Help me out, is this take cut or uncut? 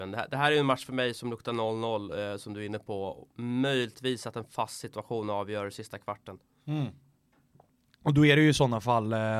uncut